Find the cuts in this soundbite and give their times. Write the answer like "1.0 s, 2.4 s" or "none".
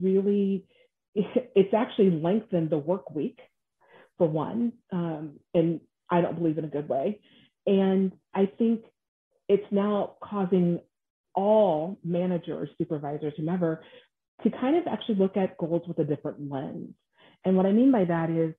none